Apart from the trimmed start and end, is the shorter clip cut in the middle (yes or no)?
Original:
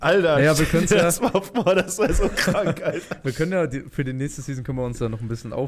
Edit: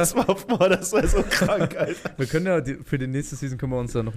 no